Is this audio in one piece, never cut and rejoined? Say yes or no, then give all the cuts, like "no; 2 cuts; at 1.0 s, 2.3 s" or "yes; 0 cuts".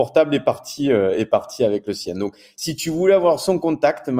yes; 0 cuts